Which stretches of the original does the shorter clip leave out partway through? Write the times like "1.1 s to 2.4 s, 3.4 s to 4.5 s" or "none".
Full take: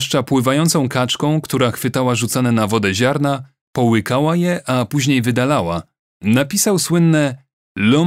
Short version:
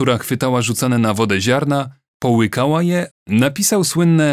4.6 s to 6.0 s